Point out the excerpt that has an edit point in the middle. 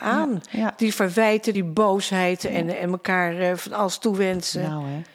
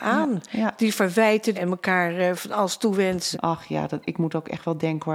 second; 2 cuts; at 1.5 s, 3.3 s

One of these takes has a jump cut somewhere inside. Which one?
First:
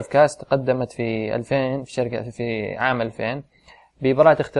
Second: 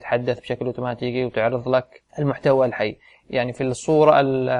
second; 1 cut; at 2.1 s

